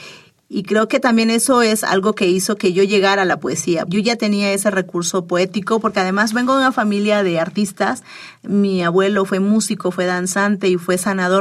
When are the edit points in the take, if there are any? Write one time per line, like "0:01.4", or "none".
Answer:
0:03.9